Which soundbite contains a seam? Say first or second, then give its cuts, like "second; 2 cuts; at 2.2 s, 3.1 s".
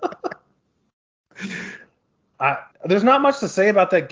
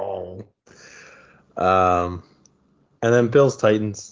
first; 1 cut; at 2.7 s